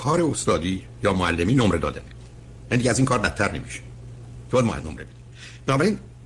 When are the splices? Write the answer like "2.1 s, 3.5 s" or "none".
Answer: none